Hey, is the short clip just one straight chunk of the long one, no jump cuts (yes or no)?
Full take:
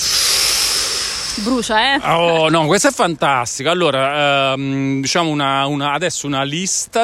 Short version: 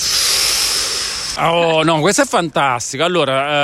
no